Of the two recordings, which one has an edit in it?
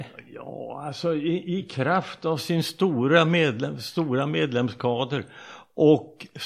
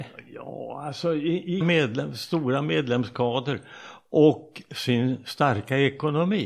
second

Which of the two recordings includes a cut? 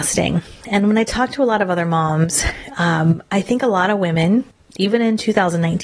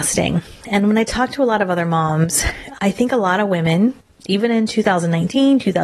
second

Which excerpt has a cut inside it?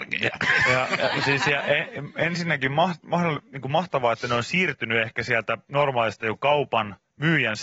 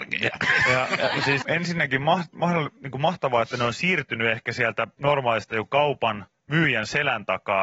second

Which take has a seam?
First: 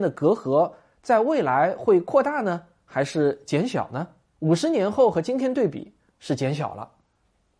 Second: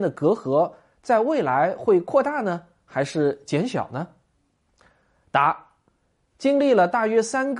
first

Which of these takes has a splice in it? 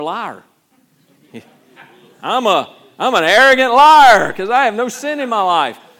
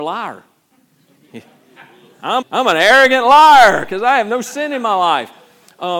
second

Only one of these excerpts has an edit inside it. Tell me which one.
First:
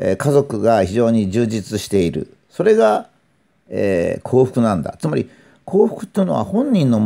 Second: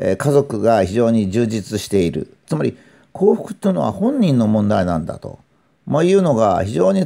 second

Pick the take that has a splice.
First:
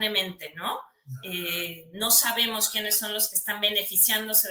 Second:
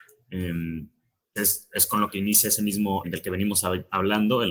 second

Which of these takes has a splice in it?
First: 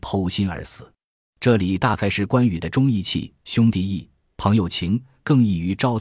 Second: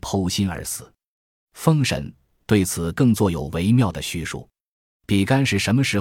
first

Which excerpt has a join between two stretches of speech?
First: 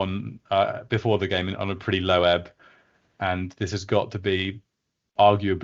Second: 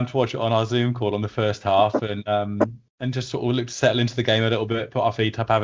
second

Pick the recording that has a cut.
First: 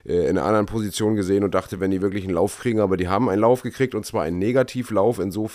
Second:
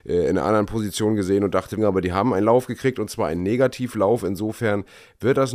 second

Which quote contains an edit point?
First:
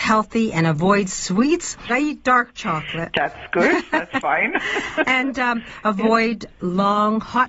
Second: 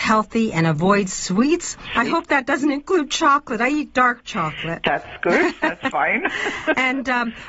first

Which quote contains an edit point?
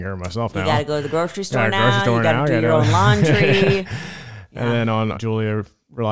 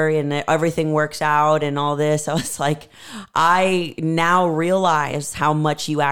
first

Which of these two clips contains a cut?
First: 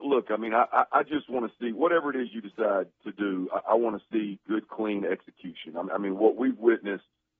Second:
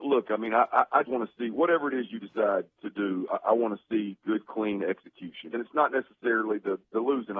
second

